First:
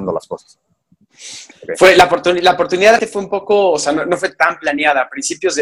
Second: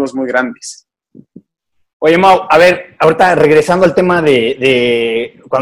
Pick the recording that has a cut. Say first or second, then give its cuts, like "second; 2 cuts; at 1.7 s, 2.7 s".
first; 2 cuts; at 1.5 s, 3.0 s